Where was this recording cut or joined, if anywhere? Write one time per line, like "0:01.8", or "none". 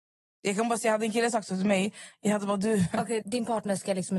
0:03.2

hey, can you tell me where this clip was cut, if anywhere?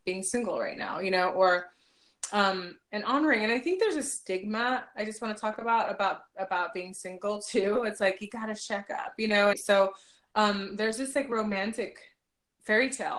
0:09.5

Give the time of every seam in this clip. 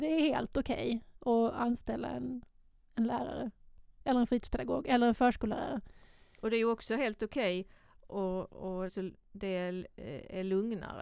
0:08.9

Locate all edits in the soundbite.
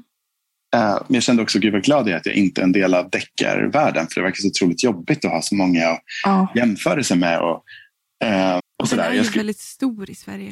0:08.6

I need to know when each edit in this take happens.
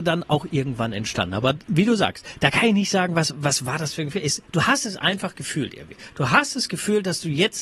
none

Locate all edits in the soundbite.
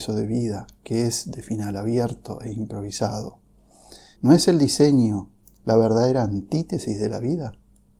0:04.1

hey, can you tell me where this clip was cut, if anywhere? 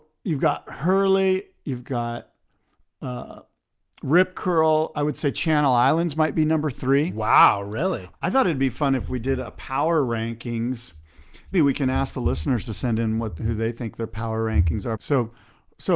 0:08.1
0:11.5
0:15.0

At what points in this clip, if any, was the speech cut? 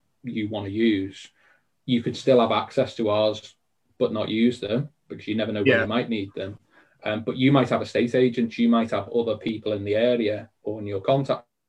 none

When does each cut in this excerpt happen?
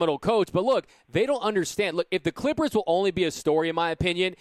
none

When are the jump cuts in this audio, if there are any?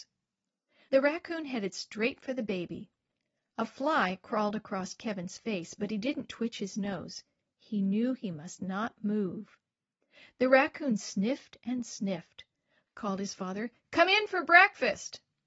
0:06.3
0:12.8

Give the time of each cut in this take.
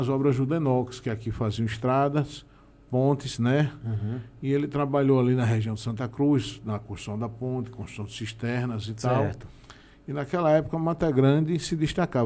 none

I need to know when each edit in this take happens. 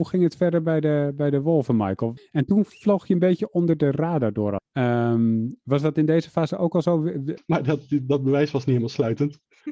0:02.2
0:04.6
0:07.4

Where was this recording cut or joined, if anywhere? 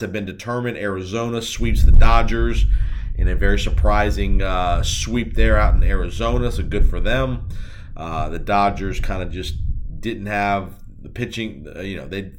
none

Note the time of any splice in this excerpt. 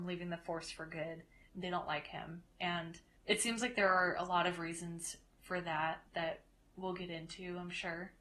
0:01.5
0:06.1

